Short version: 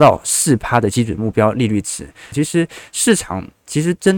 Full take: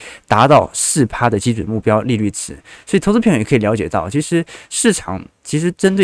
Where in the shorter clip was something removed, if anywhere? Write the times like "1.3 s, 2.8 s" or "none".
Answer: 2.3 s